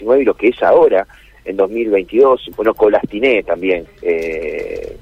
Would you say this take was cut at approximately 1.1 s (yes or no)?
no